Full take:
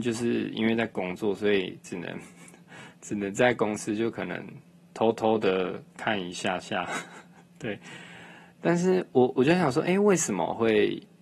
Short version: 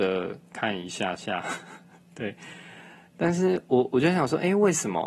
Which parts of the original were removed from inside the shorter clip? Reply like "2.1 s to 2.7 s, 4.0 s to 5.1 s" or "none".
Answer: none